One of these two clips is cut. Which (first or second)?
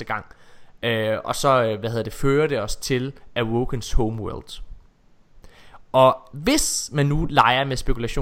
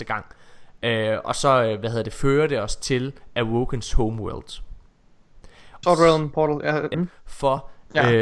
second